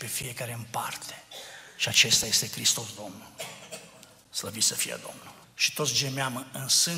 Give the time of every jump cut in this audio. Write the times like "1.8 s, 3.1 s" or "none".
5.4 s